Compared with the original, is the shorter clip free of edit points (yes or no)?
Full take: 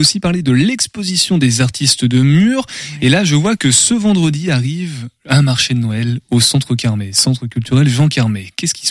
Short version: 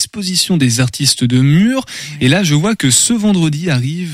yes